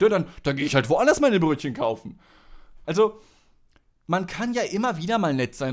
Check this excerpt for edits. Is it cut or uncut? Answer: cut